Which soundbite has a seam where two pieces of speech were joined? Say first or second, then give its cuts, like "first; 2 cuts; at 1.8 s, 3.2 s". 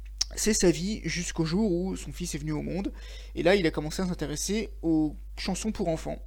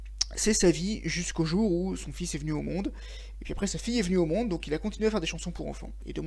second; 1 cut; at 3.3 s